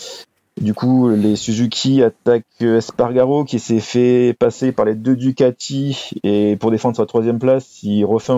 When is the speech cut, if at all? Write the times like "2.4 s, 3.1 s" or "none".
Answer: none